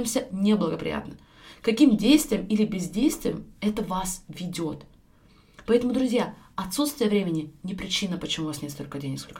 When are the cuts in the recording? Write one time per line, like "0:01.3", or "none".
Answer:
none